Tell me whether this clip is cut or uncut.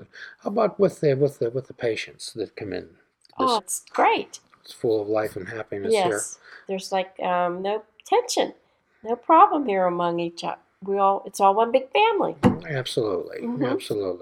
cut